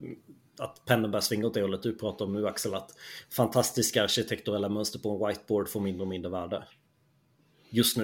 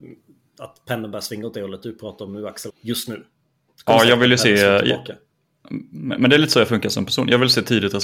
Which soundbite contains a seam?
second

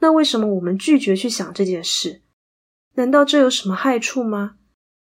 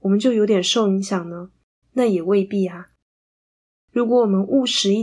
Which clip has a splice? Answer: second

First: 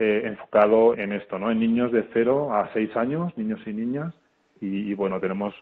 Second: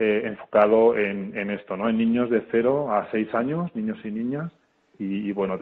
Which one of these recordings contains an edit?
first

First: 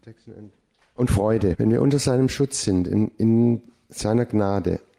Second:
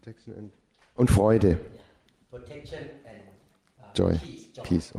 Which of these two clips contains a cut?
first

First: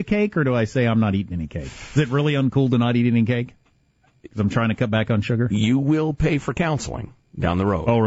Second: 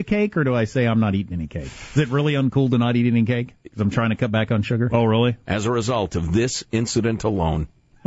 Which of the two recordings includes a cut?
second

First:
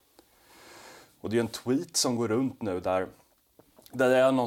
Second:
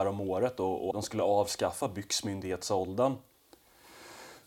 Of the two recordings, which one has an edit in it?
second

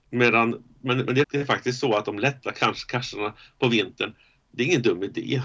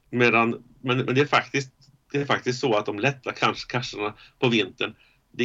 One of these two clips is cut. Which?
first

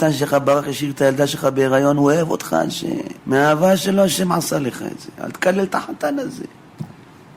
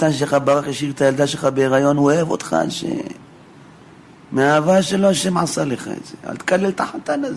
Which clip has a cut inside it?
first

